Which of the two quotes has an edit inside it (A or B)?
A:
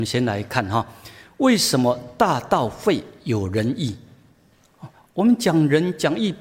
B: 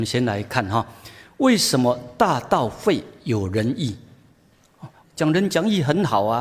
B